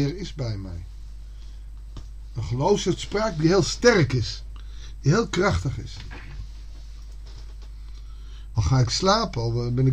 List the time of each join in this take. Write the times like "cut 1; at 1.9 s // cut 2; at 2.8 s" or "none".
cut 1; at 8.5 s